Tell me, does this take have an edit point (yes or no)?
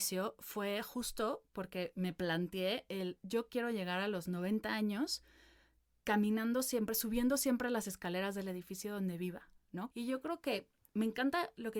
yes